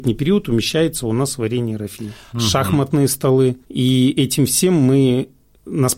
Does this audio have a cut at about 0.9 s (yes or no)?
no